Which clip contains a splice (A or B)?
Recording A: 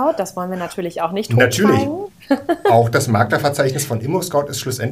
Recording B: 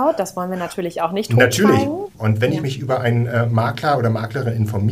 B